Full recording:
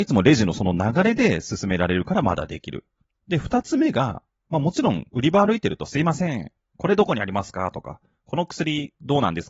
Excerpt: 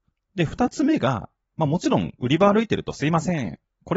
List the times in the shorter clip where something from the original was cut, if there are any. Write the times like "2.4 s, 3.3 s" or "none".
none

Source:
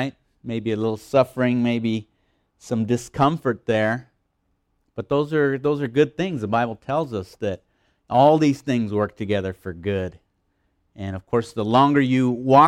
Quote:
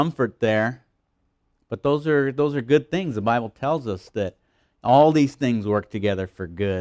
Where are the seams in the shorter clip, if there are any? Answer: none

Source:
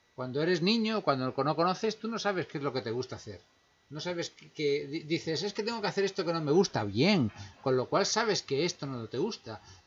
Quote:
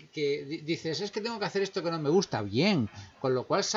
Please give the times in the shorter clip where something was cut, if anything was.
none

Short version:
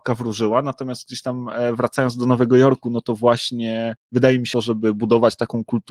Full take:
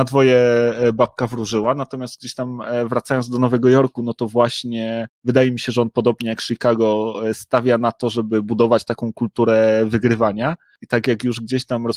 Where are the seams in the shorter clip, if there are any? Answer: 4.5 s

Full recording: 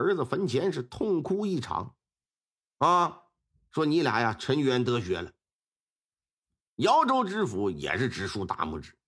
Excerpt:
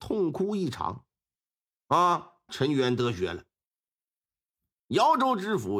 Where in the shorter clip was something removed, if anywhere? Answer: 2.5 s

